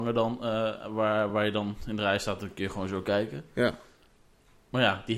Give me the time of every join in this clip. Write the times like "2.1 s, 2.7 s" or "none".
none